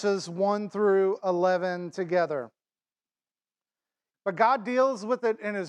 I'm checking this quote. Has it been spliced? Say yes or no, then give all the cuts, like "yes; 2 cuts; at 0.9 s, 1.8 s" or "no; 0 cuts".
yes; 1 cut; at 4.1 s